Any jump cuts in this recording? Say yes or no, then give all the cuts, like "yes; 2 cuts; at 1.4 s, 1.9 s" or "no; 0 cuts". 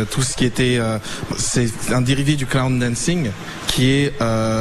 yes; 1 cut; at 1.3 s